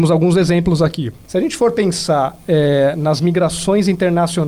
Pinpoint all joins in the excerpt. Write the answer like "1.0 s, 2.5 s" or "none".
1.2 s